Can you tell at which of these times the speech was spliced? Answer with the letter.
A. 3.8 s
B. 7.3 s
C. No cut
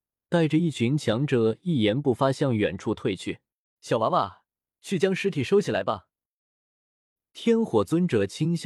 A